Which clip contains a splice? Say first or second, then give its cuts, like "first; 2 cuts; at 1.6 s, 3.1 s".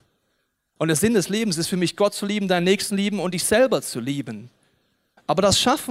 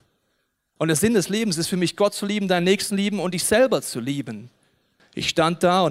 second; 1 cut; at 5.0 s